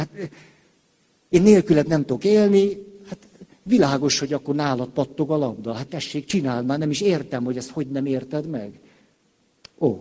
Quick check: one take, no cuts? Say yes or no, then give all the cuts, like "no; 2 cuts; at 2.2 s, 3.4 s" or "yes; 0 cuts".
no; 1 cut; at 5.9 s